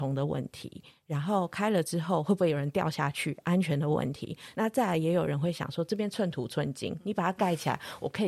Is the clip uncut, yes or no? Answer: yes